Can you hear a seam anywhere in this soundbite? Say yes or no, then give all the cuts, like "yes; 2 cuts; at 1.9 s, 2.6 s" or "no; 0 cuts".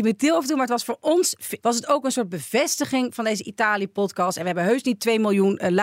yes; 1 cut; at 1.6 s